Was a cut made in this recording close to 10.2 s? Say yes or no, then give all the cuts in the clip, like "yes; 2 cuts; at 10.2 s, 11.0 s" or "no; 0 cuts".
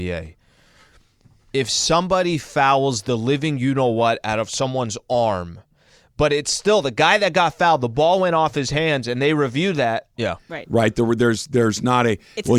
yes; 1 cut; at 10.2 s